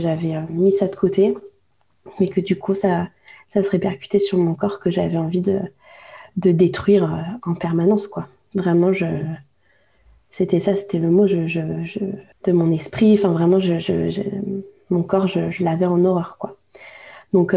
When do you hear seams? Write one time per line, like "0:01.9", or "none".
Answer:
0:12.3

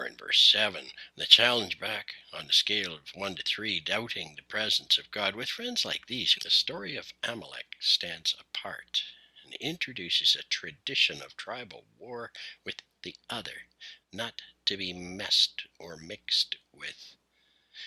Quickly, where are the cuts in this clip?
0:01.1
0:06.3
0:14.0

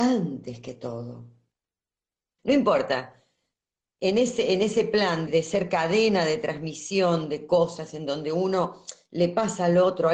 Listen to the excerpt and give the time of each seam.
0:02.4
0:05.3

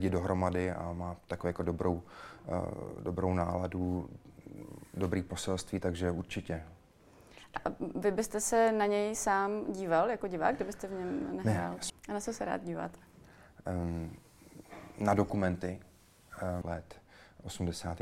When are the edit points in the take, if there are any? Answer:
0:11.9
0:16.6

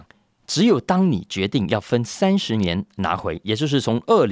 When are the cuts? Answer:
none

